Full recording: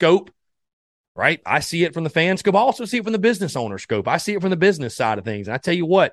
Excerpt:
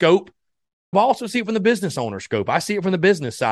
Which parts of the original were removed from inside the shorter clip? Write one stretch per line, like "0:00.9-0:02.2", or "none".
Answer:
0:00.9-0:02.5